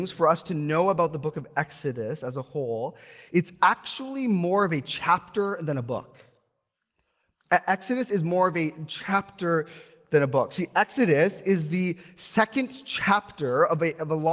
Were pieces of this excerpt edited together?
no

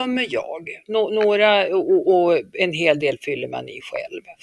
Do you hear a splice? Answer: no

